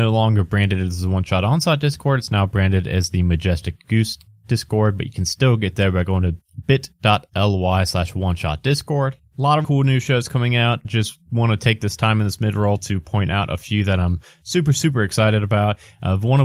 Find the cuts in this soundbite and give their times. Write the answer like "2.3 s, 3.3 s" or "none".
9.6 s, 10.8 s